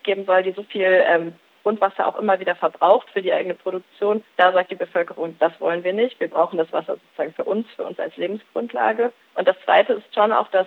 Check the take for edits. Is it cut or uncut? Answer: uncut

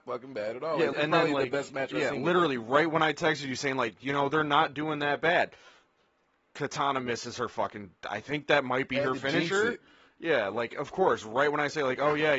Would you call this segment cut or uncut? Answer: cut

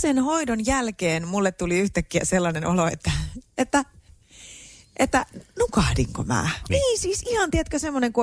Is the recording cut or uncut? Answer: cut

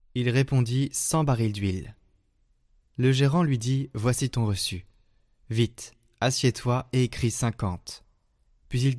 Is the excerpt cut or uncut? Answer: uncut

